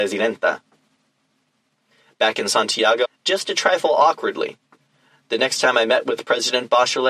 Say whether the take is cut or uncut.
cut